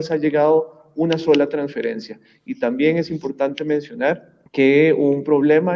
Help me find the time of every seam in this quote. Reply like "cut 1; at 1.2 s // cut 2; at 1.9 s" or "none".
cut 1; at 4.5 s